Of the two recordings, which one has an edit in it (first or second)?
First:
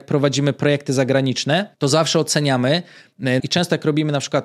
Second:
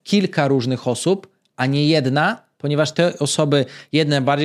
first